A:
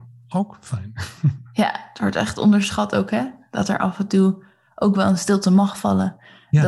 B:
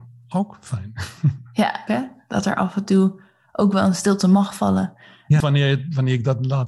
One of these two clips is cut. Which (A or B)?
B